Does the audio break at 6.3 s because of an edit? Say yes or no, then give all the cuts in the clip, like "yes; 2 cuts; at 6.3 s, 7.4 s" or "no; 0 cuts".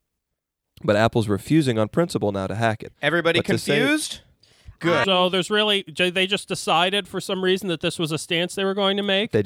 no; 2 cuts; at 2.9 s, 5.0 s